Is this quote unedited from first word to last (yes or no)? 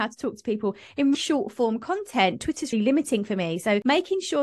no